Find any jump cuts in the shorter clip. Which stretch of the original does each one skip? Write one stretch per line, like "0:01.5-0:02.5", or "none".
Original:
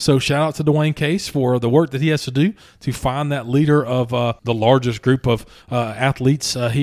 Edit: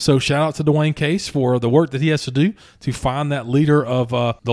none

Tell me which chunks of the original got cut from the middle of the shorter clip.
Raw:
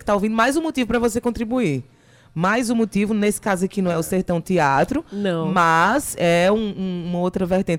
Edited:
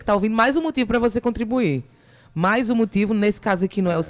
none

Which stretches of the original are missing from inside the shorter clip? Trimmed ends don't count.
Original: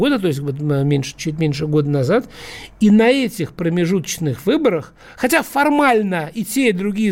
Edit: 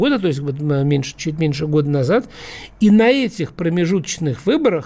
none

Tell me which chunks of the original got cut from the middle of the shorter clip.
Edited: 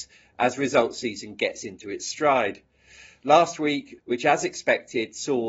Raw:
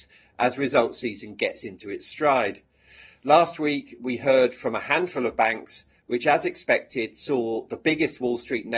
0:04.0-0:06.0

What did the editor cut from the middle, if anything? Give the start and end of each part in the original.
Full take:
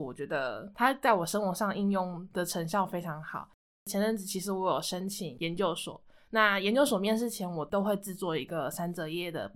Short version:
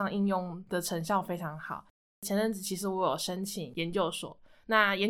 none

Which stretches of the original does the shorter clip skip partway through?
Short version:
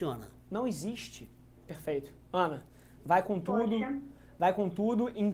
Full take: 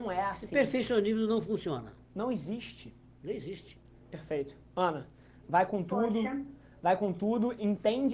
0:03.2-0:04.0

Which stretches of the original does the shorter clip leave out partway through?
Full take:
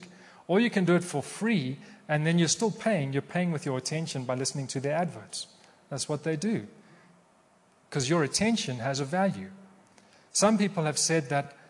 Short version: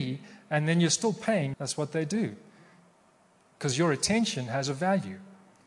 0:03.1-0:05.9

